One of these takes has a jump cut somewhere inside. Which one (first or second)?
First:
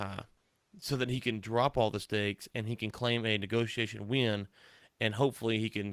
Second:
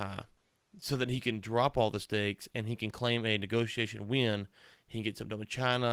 second